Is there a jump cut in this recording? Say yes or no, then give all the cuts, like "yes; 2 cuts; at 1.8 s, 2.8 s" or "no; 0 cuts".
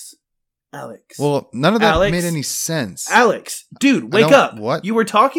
no; 0 cuts